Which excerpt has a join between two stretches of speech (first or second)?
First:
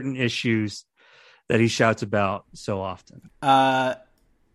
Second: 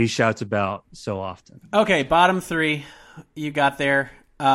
first